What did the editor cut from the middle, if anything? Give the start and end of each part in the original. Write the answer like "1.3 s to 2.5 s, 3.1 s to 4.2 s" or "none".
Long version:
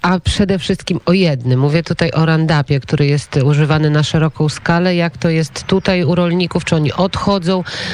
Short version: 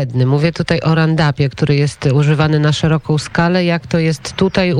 none